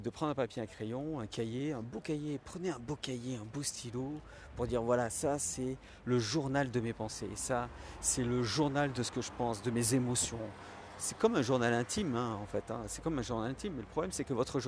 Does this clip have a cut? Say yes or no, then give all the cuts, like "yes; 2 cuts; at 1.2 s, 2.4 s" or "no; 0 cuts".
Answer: no; 0 cuts